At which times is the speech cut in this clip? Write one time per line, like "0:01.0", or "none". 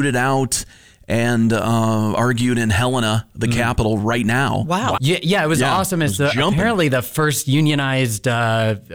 0:05.0